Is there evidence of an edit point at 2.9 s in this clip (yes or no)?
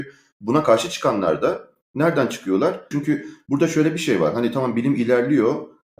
yes